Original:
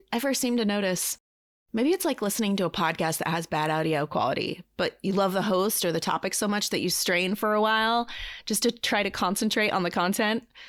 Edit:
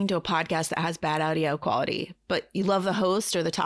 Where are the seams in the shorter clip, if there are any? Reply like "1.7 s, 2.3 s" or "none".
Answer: none

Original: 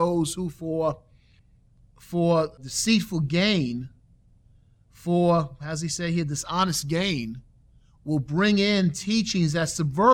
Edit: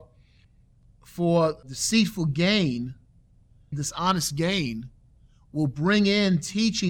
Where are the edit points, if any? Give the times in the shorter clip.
3.7 s

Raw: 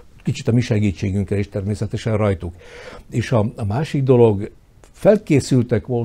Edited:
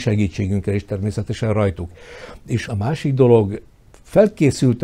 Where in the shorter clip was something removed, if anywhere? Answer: 2.6 s

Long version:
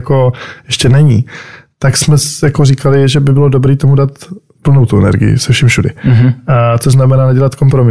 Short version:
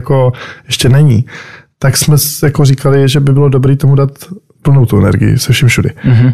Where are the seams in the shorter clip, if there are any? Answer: none

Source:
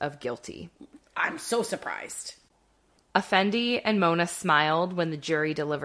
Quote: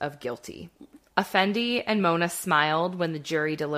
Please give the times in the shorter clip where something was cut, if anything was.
1.1 s

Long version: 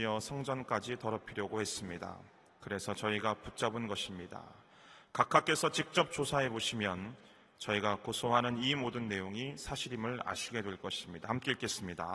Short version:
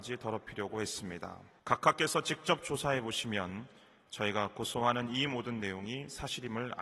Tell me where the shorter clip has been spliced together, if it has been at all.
1.6 s

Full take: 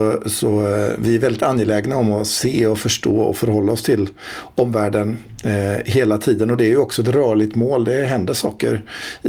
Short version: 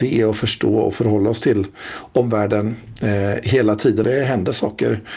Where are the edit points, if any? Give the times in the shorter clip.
4.0 s

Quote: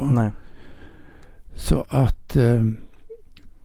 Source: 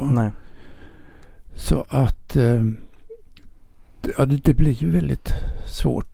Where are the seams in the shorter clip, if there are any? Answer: none

